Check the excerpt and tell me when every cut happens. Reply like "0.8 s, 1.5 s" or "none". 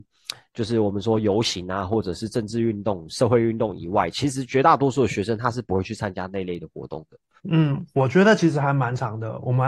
7.4 s